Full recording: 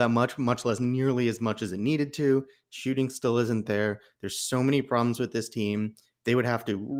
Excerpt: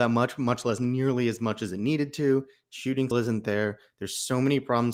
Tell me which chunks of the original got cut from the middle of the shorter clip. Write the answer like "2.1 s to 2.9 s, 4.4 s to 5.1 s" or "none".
3.1 s to 3.3 s